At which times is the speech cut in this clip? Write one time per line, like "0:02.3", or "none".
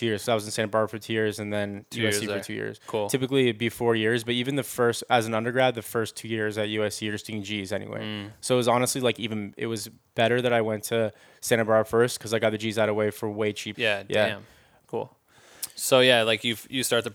0:13.7
0:14.8